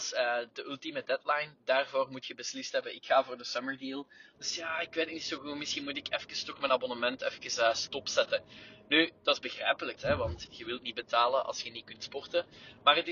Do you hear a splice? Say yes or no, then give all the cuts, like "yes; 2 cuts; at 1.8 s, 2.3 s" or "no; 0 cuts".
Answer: yes; 2 cuts; at 4.3 s, 10.0 s